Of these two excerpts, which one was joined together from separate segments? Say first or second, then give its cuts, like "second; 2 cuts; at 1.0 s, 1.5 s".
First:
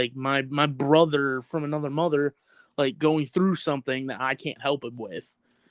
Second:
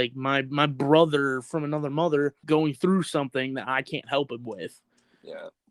second; 1 cut; at 2.4 s